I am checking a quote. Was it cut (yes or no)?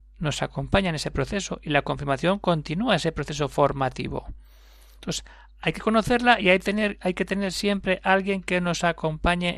no